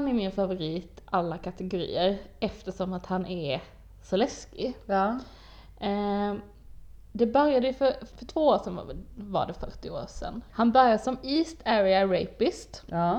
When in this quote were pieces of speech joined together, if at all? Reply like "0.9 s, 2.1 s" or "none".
8.1 s, 10.5 s